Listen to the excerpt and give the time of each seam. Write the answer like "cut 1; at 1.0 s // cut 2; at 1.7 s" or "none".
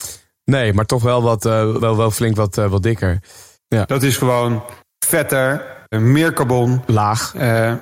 cut 1; at 1.8 s // cut 2; at 3.5 s // cut 3; at 5.9 s